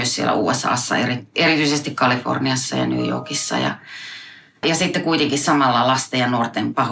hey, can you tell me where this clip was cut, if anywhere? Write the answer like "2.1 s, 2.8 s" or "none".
4.6 s